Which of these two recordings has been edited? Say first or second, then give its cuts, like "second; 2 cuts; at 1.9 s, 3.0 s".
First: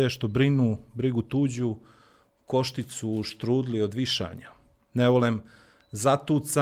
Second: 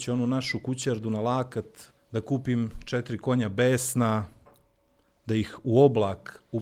second; 1 cut; at 2.0 s